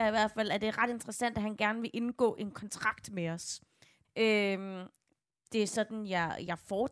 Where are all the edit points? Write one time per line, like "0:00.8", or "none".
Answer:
0:04.0

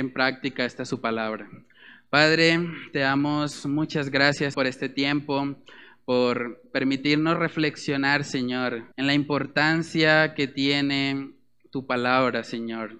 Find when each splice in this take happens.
0:04.5
0:08.9

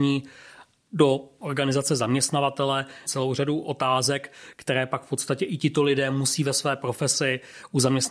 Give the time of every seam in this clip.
0:03.1

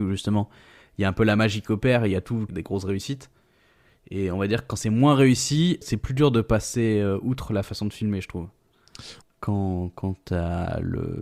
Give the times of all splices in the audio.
0:02.5
0:05.8
0:09.2

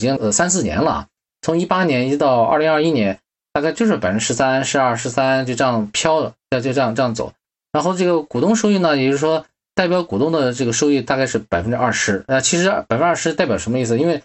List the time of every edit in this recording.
none

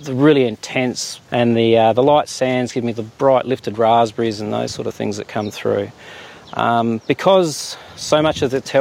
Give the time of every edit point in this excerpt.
0:01.3

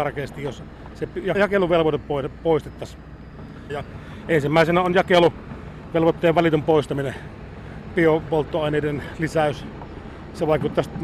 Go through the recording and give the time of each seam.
0:01.3
0:03.7
0:07.9

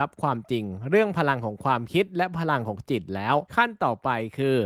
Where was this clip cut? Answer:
0:03.5

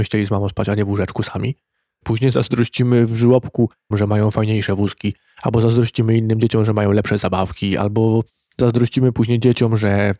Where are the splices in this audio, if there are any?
0:02.0
0:03.9

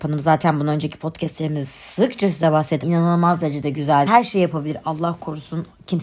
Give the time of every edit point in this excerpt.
0:02.8
0:04.1

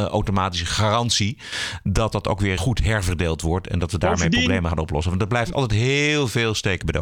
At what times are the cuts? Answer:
0:02.6

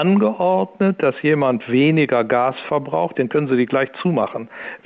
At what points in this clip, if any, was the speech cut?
0:03.1

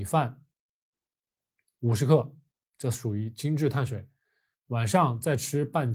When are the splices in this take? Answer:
0:04.5

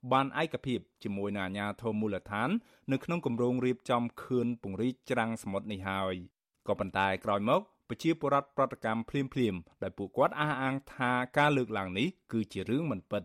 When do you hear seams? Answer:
none

